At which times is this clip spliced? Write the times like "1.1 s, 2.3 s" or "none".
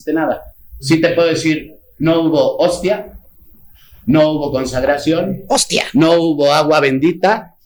none